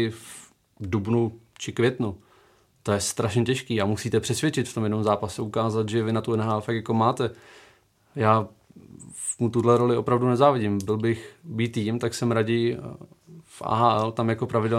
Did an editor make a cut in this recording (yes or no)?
no